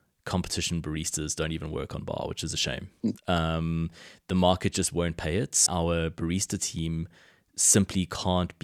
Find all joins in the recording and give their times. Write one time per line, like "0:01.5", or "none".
0:03.1
0:05.7